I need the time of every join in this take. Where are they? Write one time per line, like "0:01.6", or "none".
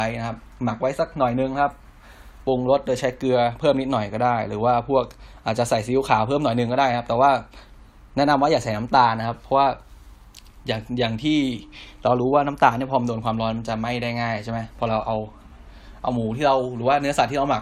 none